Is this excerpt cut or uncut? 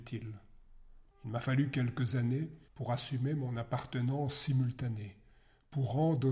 cut